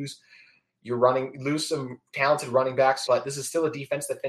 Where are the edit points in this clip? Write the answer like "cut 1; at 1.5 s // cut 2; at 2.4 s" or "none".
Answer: cut 1; at 3.1 s